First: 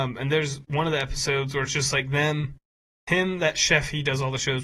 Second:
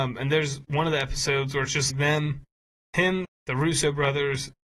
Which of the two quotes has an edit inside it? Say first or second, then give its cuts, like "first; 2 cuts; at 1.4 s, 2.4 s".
second; 2 cuts; at 1.9 s, 3.2 s